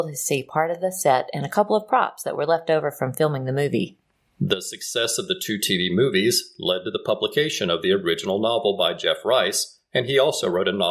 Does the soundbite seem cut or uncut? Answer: uncut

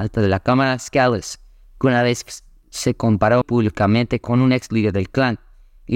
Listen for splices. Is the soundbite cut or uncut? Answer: cut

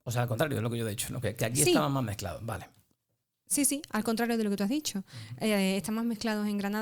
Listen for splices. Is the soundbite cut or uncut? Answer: uncut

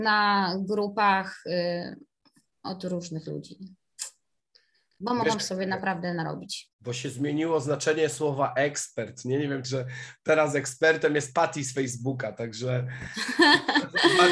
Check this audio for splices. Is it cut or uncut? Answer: cut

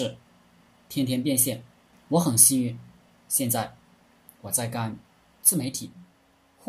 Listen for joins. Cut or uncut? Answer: cut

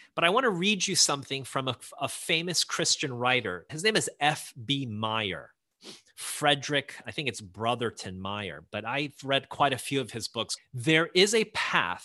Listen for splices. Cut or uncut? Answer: cut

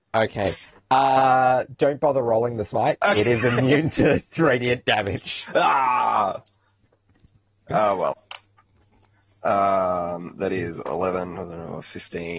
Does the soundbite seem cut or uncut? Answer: uncut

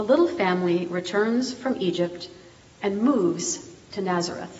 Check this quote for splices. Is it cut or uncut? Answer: uncut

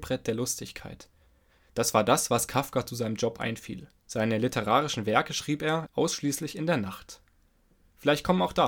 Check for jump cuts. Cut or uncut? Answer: cut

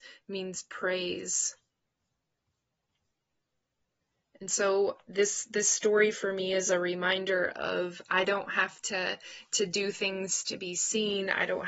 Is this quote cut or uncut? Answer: uncut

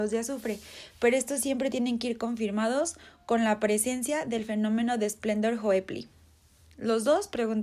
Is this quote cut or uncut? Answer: uncut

